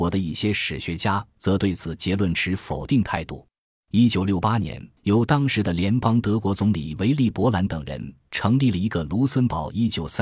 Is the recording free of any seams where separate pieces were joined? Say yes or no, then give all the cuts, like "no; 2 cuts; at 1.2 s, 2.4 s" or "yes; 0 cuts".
no; 2 cuts; at 3.8 s, 5.0 s